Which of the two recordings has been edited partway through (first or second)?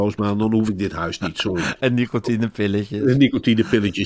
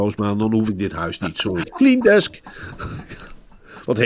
second